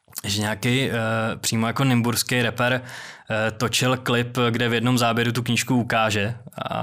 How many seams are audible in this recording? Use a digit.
0